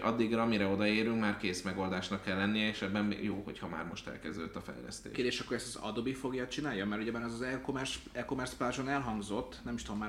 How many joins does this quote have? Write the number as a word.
zero